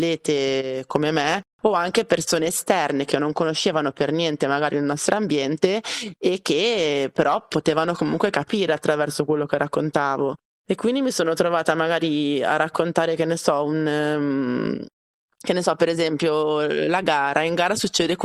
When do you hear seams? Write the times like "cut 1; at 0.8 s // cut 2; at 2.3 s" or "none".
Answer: none